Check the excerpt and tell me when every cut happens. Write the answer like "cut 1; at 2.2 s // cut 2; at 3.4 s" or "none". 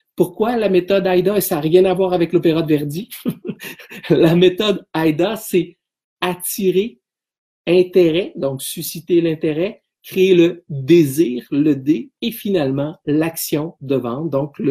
none